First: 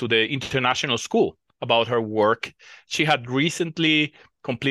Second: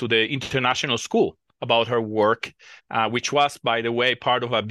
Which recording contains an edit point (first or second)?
second